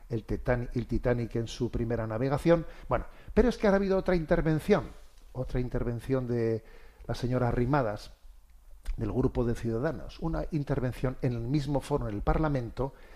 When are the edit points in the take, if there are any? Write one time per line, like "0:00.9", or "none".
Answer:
none

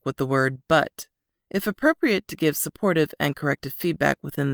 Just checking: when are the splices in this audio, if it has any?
0:01.3

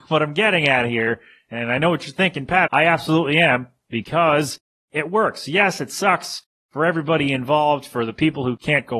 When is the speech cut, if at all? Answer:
0:02.7

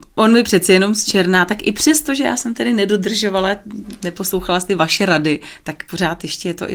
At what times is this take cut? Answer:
none

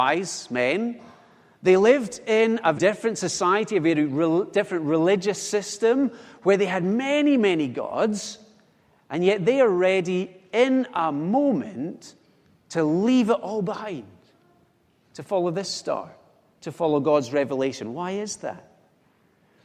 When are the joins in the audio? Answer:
0:02.7

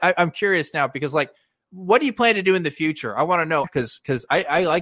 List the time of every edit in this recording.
0:03.6

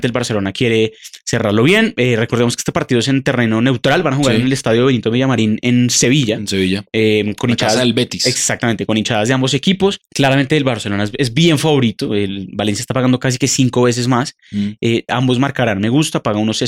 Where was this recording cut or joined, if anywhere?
0:15.1

